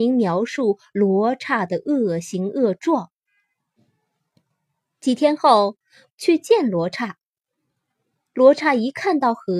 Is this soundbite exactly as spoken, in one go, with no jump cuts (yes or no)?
no